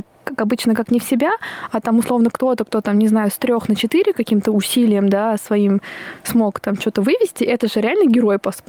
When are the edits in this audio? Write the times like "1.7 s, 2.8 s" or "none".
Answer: none